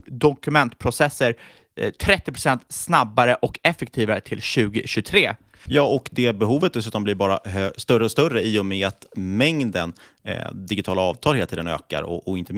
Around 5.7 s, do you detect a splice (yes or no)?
yes